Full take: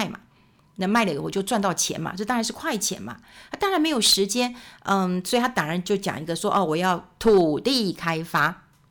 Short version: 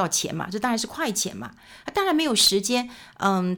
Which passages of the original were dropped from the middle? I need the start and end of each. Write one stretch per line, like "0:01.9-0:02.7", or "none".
none